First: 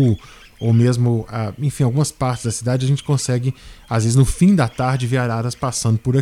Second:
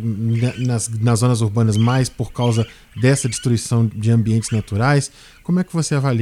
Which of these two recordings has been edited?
second; 1 cut; at 3.9 s

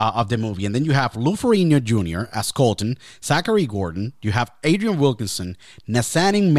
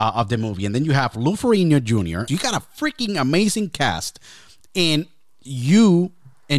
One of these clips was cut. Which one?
second; 1 cut; at 2.3 s

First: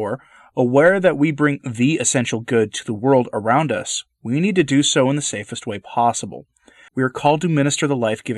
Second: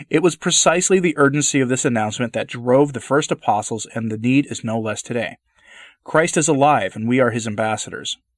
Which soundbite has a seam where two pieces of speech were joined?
first; 1 cut; at 6.9 s

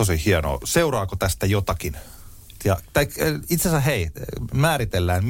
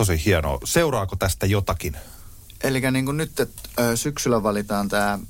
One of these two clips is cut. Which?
first; 1 cut; at 2.6 s

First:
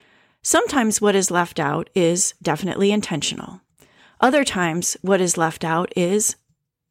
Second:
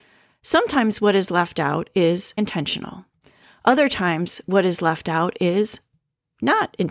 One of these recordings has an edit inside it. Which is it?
second; 1 cut; at 2.4 s

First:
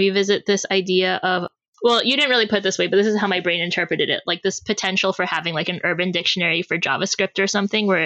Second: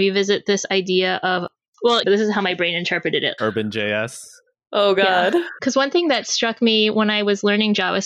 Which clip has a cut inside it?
second; 2 cuts; at 2.0 s, 3.4 s

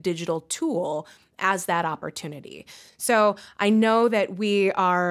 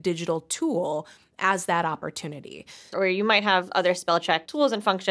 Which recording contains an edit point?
second; 1 cut; at 2.9 s

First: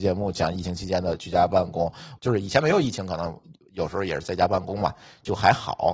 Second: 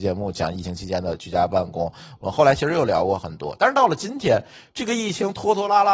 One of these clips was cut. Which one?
first; 1 cut; at 2.2 s

